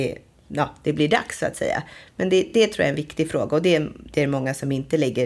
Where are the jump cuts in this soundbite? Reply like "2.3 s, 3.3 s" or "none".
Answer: none